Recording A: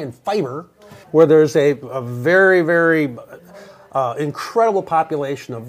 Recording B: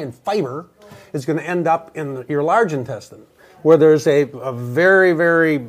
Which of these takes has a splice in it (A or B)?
A